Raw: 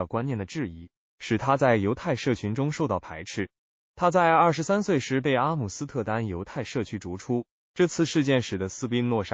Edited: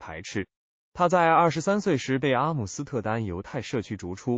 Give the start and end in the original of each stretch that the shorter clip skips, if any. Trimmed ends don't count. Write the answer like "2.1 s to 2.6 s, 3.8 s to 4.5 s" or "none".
none